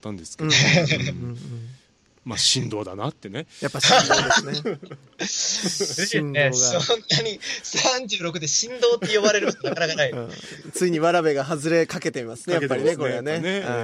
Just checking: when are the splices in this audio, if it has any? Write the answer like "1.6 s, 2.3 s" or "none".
none